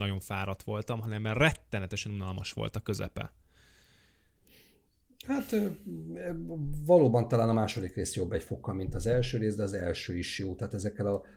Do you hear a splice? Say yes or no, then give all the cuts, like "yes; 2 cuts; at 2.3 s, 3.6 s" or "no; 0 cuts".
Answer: no; 0 cuts